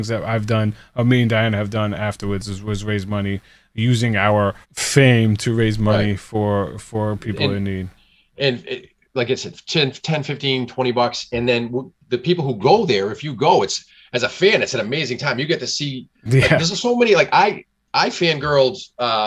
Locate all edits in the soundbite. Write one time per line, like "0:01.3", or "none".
0:04.6